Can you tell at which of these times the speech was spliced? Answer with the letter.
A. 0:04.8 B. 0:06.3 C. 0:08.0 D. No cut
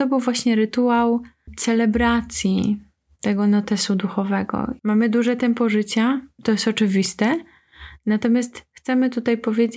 A